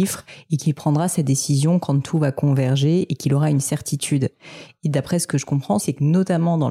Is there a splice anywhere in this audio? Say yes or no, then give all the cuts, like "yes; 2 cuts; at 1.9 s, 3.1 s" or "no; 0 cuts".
yes; 1 cut; at 5.8 s